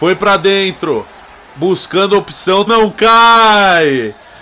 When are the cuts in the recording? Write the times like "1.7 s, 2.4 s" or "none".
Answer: 2.7 s